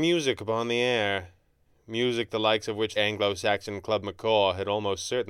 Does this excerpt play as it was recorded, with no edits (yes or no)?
no